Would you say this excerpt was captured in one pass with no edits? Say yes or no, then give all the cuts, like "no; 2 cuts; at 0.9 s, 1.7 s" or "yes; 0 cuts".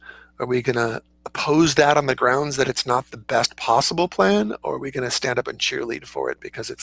yes; 0 cuts